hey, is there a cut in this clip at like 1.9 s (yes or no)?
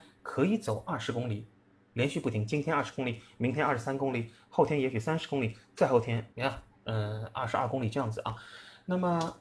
no